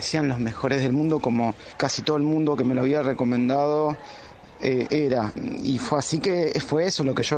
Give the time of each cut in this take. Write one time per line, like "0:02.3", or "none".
none